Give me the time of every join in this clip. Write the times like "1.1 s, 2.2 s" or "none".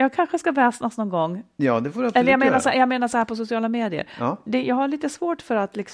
none

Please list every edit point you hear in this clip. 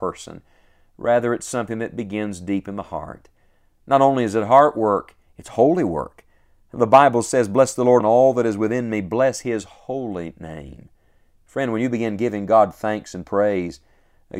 8.0 s

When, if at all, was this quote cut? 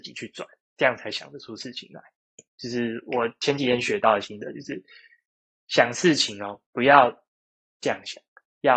2.5 s

